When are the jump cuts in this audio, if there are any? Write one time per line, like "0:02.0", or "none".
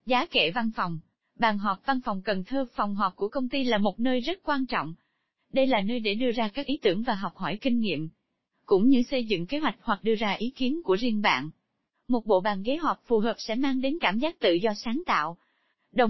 none